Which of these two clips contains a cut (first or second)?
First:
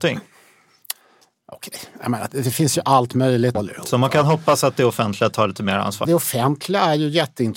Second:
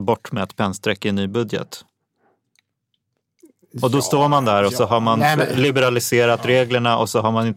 first